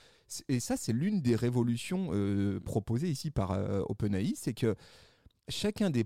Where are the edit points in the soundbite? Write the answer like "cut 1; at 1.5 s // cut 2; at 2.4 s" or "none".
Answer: none